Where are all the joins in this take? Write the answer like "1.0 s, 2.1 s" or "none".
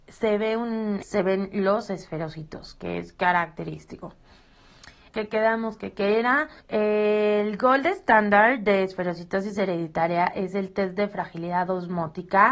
1.0 s, 5.1 s, 6.6 s